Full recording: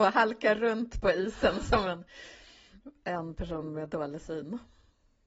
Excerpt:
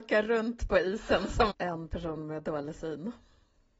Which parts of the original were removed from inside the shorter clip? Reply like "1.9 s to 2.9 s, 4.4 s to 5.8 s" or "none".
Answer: 1.8 s to 3.0 s